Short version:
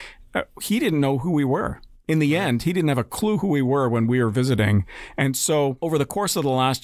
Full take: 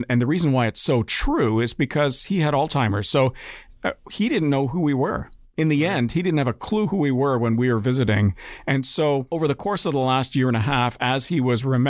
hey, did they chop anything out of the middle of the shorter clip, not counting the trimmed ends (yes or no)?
no